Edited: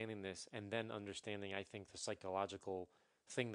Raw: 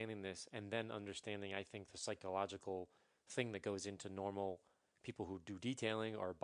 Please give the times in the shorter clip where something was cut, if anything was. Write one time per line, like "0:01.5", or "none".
none